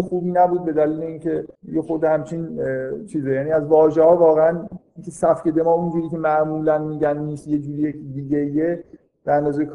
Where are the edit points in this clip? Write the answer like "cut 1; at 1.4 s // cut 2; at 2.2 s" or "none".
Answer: cut 1; at 1.5 s